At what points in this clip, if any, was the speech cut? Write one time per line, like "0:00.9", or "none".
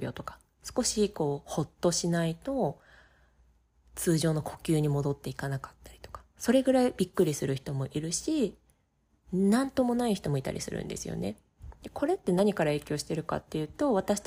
none